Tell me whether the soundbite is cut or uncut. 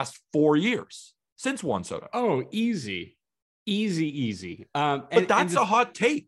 uncut